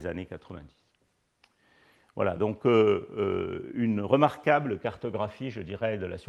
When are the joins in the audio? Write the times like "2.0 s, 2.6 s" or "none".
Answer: none